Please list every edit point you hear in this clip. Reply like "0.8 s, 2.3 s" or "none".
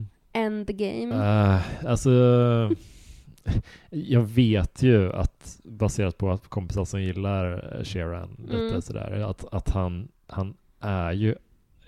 1.1 s